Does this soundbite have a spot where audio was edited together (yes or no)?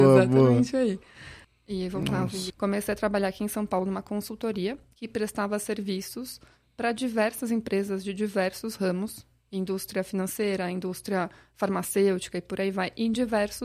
yes